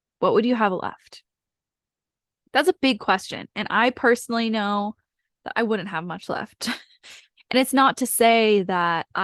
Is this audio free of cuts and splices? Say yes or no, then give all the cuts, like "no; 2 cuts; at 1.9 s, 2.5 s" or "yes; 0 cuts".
yes; 0 cuts